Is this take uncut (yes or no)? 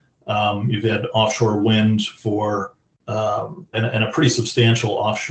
no